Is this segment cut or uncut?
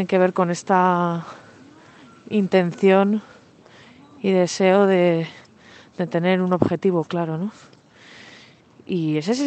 uncut